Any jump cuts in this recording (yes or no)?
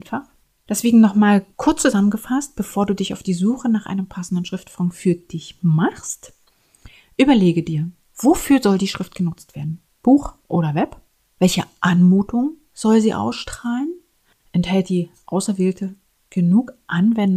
yes